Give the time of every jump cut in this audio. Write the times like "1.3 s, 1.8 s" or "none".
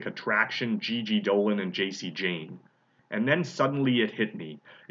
3.0 s